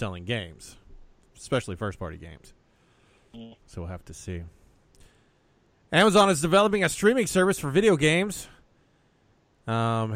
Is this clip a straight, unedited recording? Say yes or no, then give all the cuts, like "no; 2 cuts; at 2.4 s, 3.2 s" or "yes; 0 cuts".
no; 1 cut; at 3.6 s